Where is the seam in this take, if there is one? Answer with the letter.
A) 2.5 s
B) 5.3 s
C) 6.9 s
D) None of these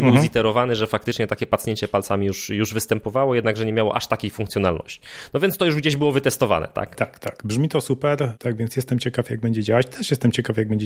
C